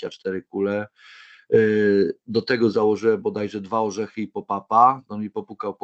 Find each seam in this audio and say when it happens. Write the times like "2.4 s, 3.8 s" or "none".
none